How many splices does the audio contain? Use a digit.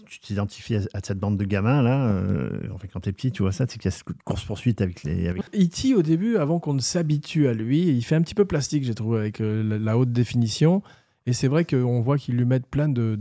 1